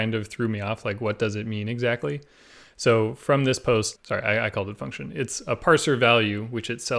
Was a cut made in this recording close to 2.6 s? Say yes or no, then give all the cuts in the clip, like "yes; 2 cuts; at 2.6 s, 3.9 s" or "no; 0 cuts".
no; 1 cut; at 4.0 s